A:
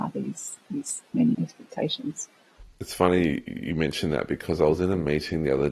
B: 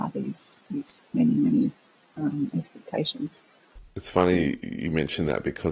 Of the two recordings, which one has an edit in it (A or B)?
A